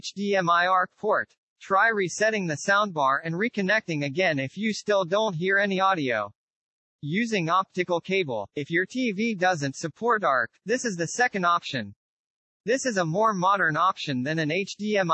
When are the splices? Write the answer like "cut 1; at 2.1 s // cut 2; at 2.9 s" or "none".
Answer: cut 1; at 1.5 s

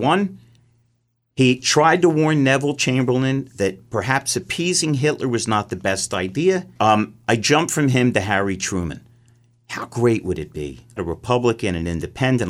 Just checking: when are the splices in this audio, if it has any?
cut 1; at 6.8 s // cut 2; at 11.0 s

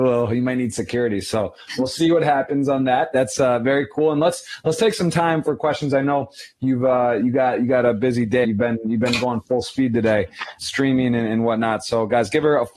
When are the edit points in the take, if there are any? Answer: cut 1; at 8.4 s // cut 2; at 10.6 s

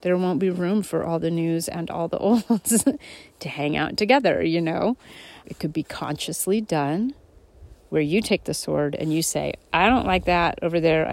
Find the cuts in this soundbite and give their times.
cut 1; at 5.4 s

